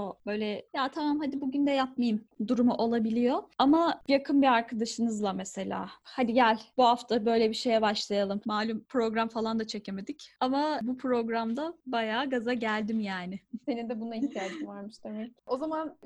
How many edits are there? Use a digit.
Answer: 2